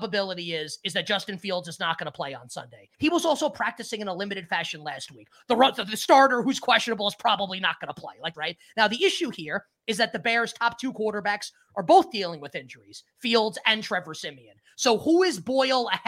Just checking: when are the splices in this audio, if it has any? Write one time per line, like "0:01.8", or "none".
0:02.9
0:05.4
0:08.3